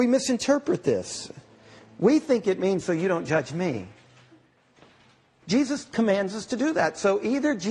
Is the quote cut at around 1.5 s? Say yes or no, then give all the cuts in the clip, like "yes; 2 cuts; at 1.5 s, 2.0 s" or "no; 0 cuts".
no; 2 cuts; at 2.8 s, 5.4 s